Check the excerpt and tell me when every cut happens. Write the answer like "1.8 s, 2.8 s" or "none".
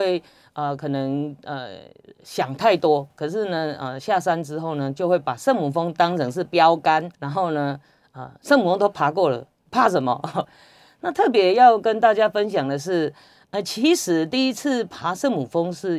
7.1 s, 10.4 s